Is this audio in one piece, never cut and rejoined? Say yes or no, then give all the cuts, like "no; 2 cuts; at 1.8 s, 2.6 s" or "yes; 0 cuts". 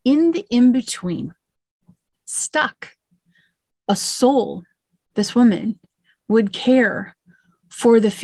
yes; 0 cuts